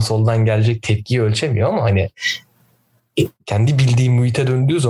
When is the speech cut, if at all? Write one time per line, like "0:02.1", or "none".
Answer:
none